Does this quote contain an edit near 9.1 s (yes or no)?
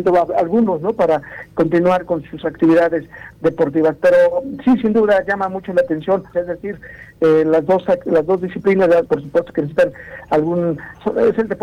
yes